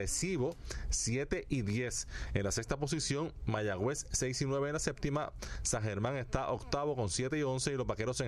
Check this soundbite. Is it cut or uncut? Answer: uncut